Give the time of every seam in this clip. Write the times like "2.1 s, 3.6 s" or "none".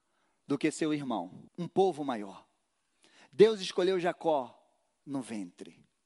1.5 s